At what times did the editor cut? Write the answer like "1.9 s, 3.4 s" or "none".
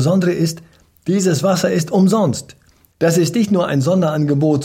2.9 s